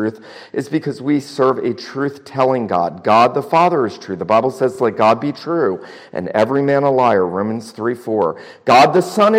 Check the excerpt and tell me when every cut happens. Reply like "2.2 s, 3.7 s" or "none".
none